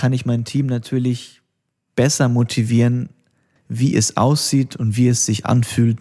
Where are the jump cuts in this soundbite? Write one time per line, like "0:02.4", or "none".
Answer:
0:03.6